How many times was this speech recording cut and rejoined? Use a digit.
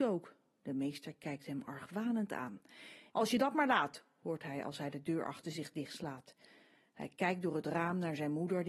1